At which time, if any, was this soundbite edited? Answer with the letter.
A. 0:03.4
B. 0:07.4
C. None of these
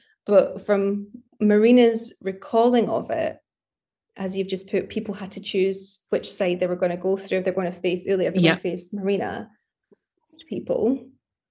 C